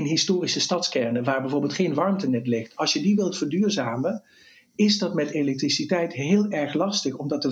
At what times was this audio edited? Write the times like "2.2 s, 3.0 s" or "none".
none